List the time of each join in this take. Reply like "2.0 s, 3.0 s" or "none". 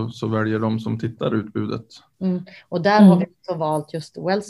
none